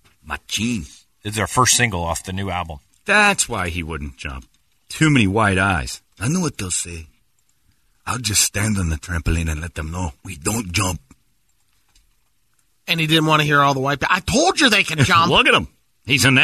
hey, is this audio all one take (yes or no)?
no